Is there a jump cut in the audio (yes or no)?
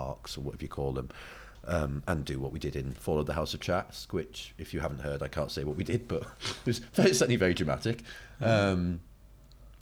no